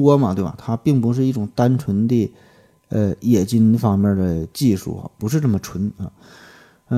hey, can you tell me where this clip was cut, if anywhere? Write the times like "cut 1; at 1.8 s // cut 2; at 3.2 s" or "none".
none